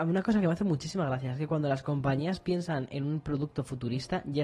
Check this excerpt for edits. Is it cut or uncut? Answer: uncut